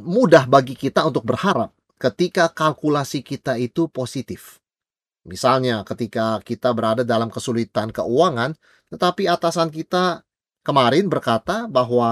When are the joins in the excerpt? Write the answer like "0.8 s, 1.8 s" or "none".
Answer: none